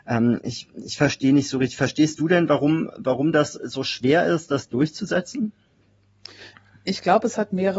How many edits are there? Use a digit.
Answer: 0